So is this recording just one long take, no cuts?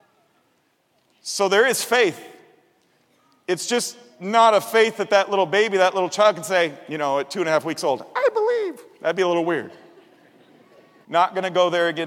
no; 1 cut; at 11.0 s

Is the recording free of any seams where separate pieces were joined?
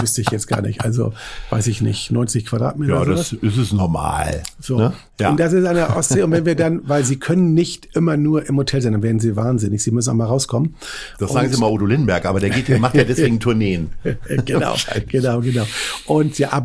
yes; 0 cuts

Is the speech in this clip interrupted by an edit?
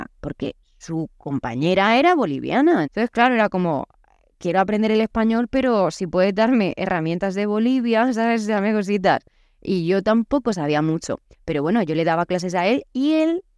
yes; 2 cuts; at 2.8 s, 11.3 s

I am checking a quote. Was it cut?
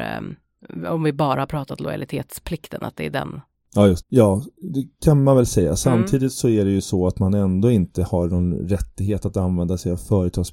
yes; 1 cut; at 4.0 s

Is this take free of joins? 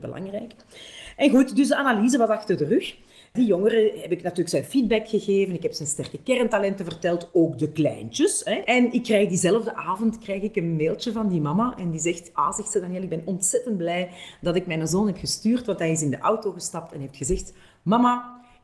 no; 1 cut; at 8.6 s

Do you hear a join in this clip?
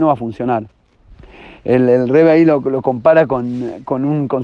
no; 0 cuts

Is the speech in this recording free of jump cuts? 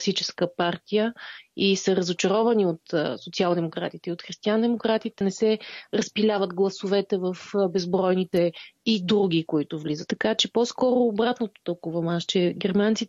no; 2 cuts; at 5.2 s, 10.1 s

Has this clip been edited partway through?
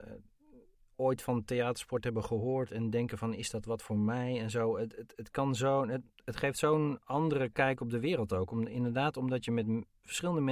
no; 0 cuts

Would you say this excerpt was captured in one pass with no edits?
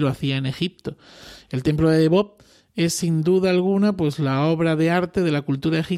yes; 0 cuts

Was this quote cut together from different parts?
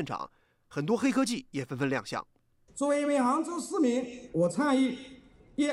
yes; 1 cut; at 2.7 s

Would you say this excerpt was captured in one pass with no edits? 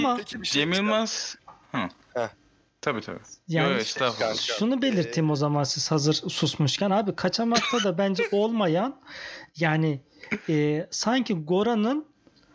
yes; 0 cuts

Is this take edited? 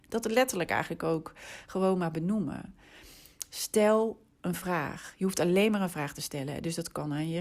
no; 0 cuts

